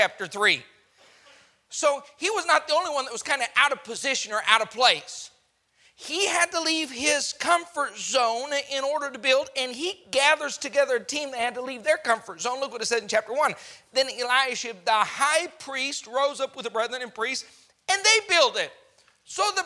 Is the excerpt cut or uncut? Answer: uncut